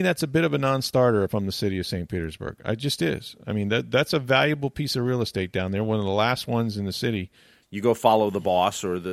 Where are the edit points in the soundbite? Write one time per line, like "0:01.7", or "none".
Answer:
0:07.6